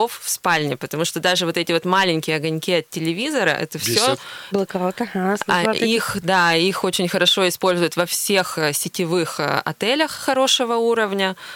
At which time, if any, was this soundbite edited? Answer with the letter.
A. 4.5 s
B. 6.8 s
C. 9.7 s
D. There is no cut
A